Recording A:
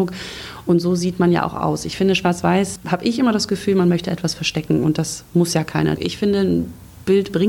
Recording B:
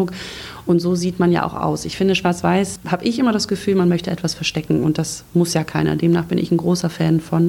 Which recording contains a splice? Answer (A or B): A